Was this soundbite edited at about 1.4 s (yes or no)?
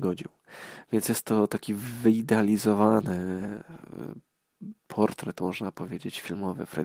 no